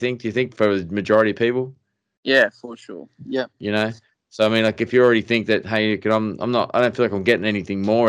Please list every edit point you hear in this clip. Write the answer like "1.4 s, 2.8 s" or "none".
none